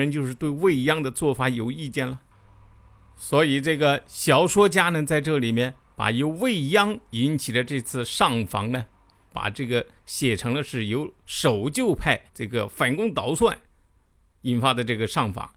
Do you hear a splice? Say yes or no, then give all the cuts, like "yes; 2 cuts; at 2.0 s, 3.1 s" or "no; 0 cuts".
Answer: yes; 2 cuts; at 9.3 s, 12.3 s